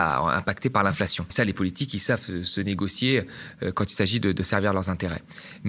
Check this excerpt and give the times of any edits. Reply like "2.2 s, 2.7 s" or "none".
1.3 s